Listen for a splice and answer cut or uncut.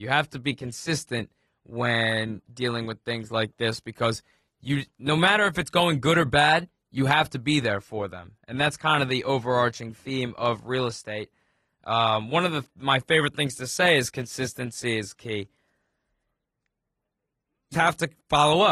cut